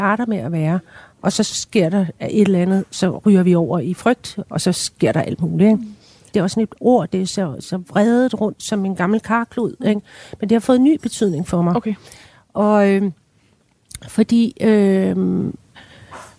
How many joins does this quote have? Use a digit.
2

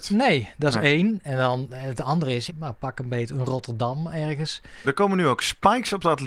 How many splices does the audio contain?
2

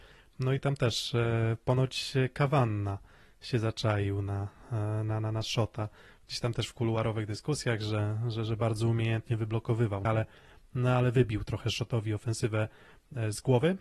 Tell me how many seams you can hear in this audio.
1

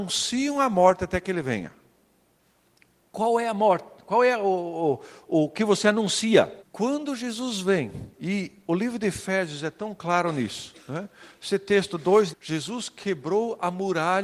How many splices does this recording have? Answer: 2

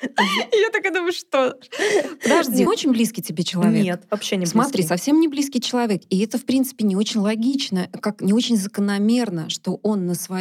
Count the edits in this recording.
1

